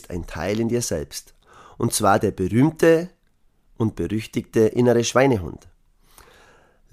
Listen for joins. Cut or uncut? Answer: uncut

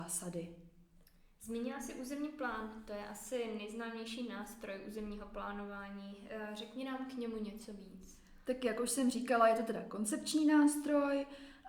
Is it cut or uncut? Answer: uncut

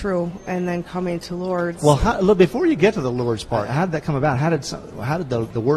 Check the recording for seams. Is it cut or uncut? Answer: uncut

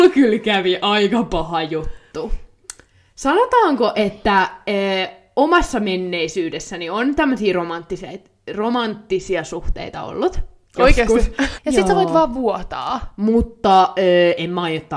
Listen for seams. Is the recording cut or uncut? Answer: cut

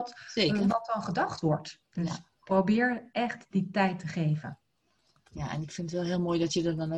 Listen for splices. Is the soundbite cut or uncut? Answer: cut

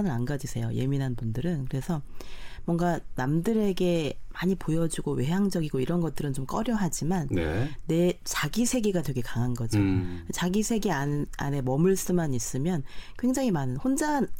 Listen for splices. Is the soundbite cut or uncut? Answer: uncut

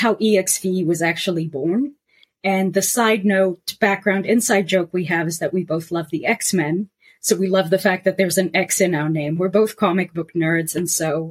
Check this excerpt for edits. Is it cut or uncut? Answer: uncut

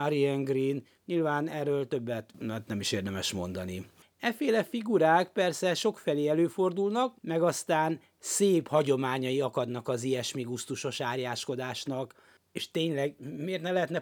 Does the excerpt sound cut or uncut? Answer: cut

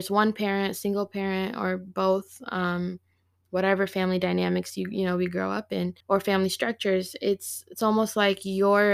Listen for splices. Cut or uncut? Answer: cut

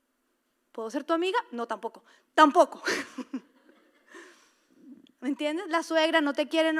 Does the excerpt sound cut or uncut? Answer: uncut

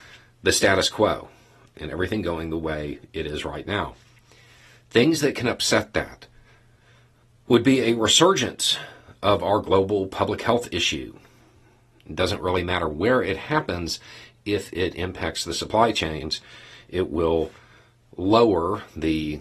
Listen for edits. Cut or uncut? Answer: uncut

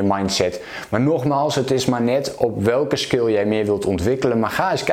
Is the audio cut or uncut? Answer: uncut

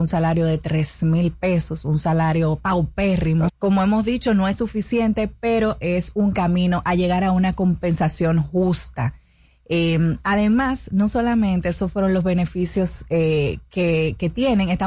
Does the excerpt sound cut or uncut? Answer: cut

